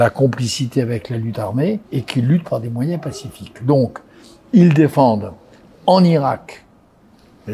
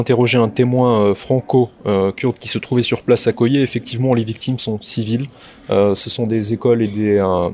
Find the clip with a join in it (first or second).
first